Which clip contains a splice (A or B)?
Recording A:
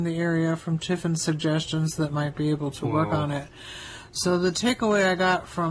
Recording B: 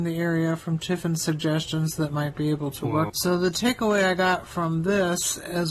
B